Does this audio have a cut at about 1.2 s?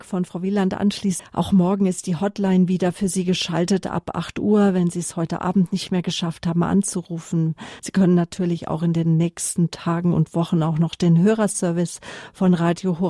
yes; 2 cuts; at 1.2 s, 7.8 s

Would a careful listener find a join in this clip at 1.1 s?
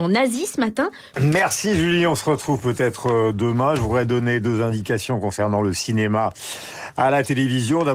yes; 1 cut; at 1.1 s

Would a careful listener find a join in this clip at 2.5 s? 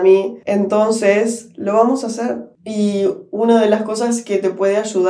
no; 0 cuts

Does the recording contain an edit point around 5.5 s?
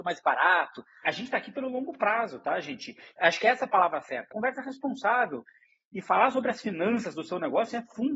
no; 3 cuts; at 1.0 s, 3.2 s, 4.3 s

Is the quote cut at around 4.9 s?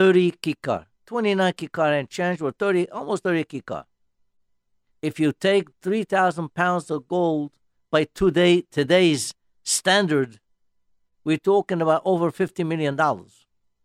yes; 1 cut; at 4.9 s

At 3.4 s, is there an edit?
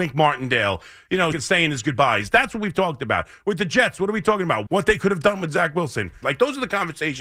no; 3 cuts; at 1.3 s, 4.7 s, 6.2 s

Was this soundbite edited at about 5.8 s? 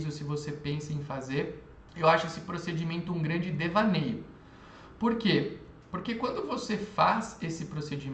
no; 1 cut; at 1.9 s

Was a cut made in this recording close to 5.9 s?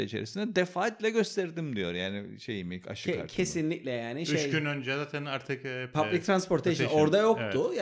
yes; 1 cut; at 5.9 s

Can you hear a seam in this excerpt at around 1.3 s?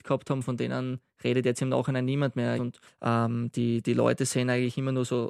no; 2 cuts; at 2.6 s, 3.8 s

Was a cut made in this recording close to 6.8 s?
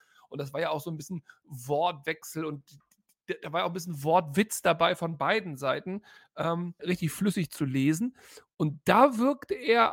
yes; 1 cut; at 6.8 s

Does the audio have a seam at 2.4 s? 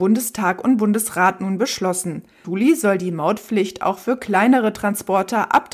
yes; 1 cut; at 2.4 s

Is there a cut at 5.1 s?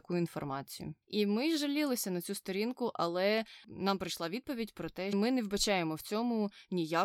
yes; 2 cuts; at 1.0 s, 5.1 s

